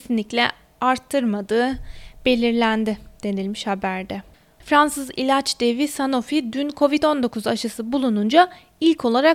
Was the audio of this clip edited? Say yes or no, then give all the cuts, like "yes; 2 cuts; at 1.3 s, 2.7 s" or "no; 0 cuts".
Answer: yes; 1 cut; at 4.6 s